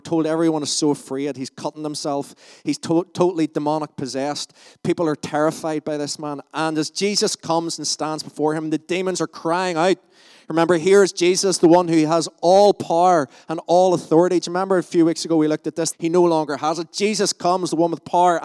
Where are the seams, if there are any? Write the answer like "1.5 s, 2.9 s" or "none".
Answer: 15.9 s

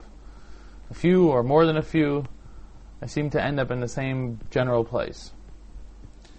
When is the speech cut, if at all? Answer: none

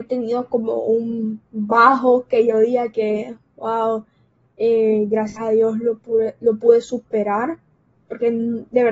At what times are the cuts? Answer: none

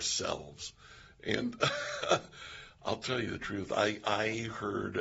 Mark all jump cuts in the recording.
none

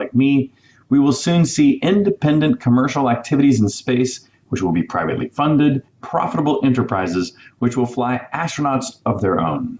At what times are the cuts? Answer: 5.9 s

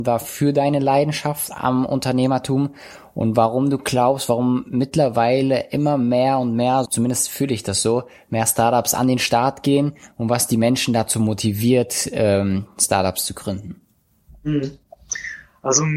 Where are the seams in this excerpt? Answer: 6.9 s

